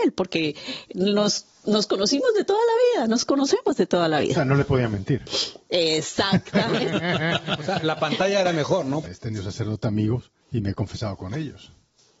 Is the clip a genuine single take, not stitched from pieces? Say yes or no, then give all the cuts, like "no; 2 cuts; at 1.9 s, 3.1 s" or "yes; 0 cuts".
no; 2 cuts; at 9.0 s, 10.4 s